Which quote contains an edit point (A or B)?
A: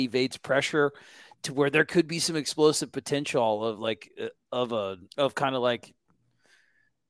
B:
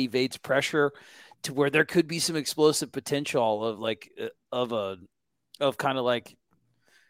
A